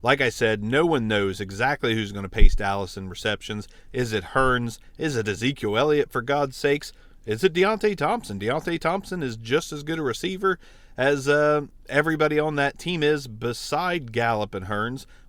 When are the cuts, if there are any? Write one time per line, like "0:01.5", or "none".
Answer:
0:03.9